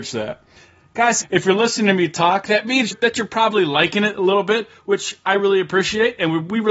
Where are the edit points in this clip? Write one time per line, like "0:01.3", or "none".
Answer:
0:01.2